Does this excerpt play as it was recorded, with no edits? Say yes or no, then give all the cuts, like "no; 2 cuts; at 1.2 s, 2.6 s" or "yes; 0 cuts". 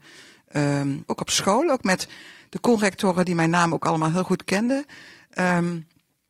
no; 1 cut; at 1.1 s